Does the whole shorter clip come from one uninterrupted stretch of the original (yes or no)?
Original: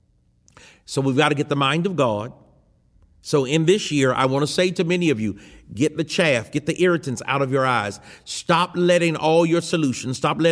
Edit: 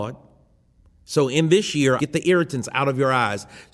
no